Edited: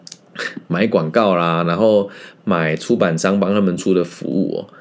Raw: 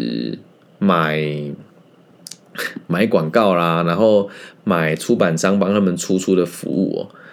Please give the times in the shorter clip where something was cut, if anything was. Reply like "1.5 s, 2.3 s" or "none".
3.8 s